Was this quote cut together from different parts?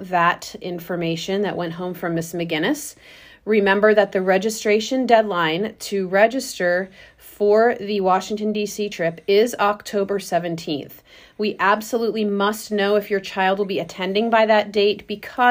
no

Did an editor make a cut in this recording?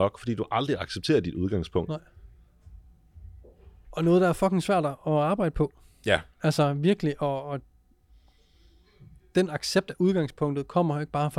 yes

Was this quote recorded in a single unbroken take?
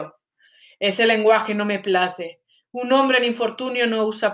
yes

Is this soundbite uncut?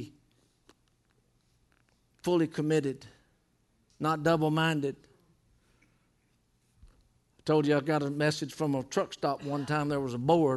yes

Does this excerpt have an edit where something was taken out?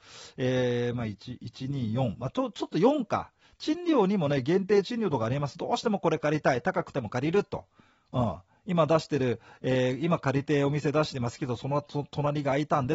no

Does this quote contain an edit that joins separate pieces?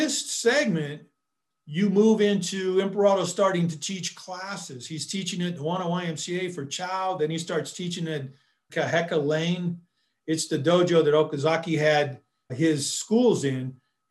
yes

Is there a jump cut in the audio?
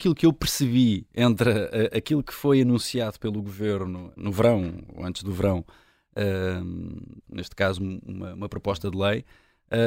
yes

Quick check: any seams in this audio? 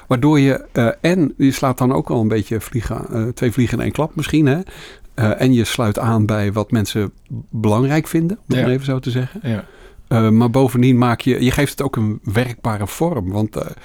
no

